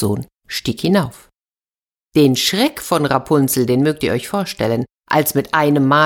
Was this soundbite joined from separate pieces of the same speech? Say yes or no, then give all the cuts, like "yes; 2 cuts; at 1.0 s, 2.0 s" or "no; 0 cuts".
no; 0 cuts